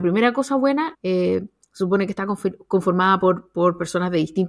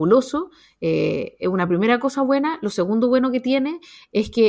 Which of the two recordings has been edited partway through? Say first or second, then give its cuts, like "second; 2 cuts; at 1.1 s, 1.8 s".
first; 1 cut; at 0.9 s